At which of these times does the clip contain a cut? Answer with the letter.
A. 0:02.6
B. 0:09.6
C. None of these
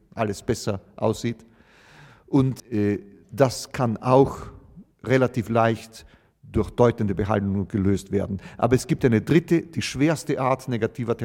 A